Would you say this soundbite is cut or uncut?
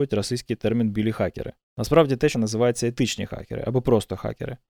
cut